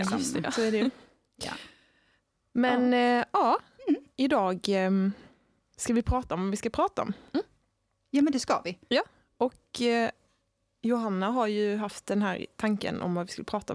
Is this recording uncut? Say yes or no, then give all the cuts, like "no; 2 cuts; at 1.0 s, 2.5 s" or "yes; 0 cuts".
yes; 0 cuts